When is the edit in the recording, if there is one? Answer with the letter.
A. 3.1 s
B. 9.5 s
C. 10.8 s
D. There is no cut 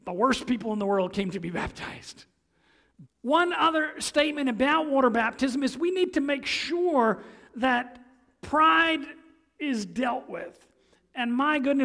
A